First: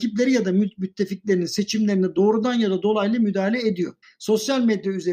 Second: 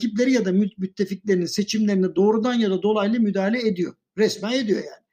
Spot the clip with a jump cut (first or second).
first